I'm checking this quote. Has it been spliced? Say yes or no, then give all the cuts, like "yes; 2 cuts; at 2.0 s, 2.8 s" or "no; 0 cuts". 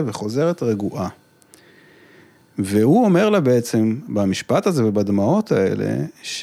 no; 0 cuts